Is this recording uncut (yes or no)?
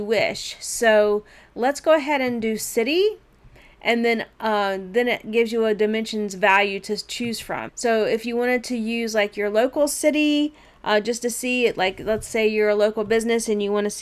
no